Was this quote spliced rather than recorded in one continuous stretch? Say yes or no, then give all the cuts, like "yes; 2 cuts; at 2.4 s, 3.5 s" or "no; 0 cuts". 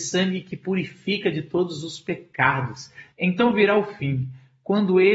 yes; 1 cut; at 3.1 s